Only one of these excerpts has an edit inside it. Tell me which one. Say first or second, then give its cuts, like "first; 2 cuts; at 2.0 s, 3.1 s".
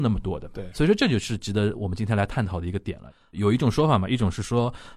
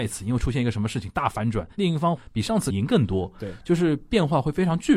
second; 1 cut; at 2.7 s